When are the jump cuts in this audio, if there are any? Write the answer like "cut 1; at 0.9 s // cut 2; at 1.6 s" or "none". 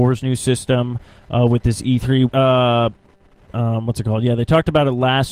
cut 1; at 2.3 s